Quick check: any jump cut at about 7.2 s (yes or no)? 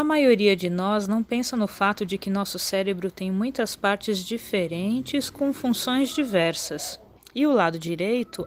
yes